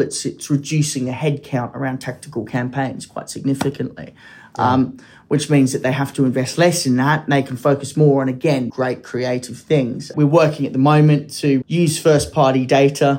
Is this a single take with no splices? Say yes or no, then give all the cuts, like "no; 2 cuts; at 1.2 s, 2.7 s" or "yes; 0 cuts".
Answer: no; 3 cuts; at 8.7 s, 10.1 s, 11.6 s